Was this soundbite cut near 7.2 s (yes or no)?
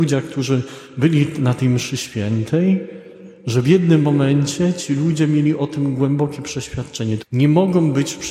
yes